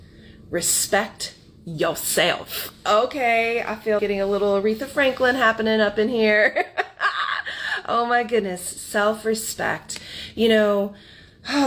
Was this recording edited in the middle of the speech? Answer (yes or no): yes